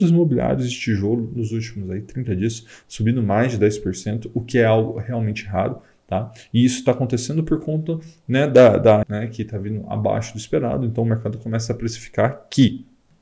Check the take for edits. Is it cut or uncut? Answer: cut